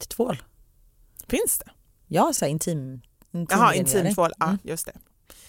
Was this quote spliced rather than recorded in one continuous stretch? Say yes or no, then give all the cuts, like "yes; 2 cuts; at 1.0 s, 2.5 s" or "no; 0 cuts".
no; 0 cuts